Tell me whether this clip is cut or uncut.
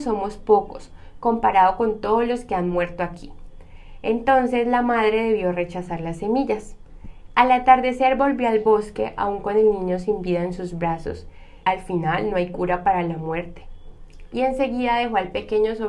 cut